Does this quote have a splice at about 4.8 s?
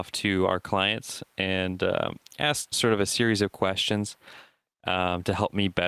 no; 1 cut; at 2.7 s

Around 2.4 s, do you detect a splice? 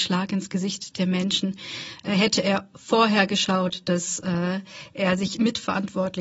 no; 0 cuts

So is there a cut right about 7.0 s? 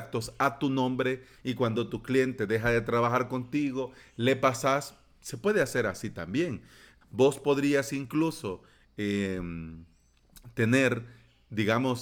yes; 1 cut; at 7.0 s

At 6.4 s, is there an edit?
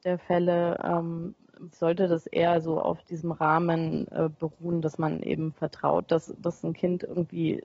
no; 1 cut; at 1.7 s

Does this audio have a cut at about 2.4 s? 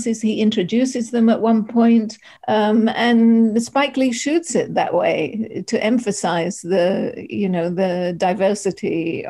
yes; 1 cut; at 2.4 s

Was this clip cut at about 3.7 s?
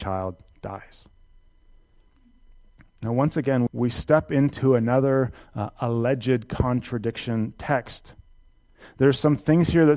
yes; 1 cut; at 3.7 s

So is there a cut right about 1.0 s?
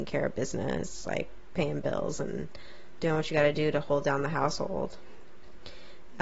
no; 0 cuts

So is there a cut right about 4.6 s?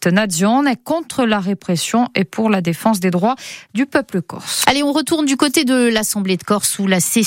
yes; 1 cut; at 4.6 s

